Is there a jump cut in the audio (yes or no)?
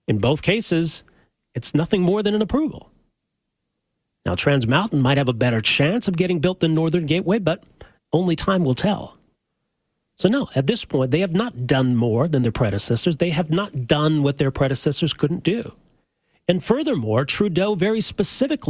no